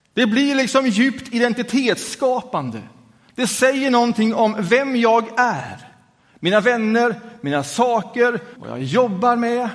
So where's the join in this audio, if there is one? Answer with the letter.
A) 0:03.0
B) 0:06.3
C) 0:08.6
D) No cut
C